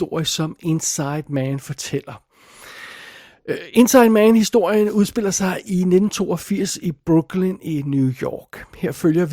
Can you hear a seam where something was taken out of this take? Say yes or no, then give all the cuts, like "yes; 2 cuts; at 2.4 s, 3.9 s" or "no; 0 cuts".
no; 0 cuts